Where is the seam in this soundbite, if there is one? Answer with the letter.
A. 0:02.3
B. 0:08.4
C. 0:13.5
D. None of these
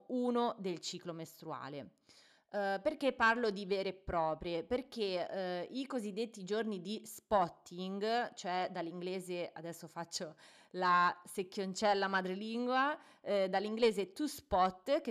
D